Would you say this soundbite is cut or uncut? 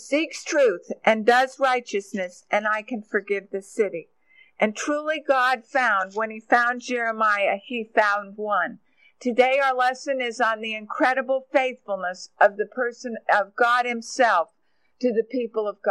uncut